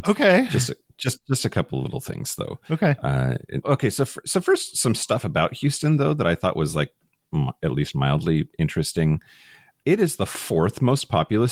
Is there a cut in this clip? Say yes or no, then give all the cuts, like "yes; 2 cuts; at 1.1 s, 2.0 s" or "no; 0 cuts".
yes; 1 cut; at 3.6 s